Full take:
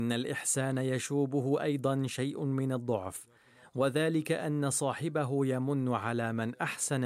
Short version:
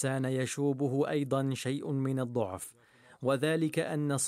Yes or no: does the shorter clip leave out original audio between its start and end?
no